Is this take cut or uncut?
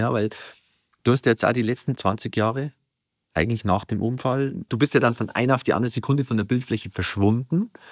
uncut